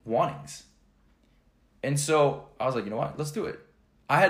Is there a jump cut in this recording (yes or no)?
no